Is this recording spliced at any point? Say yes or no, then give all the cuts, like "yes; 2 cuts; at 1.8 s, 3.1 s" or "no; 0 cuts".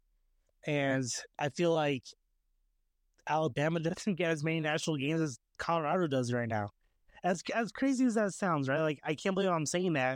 no; 0 cuts